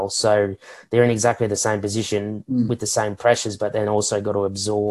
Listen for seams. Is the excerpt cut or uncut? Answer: uncut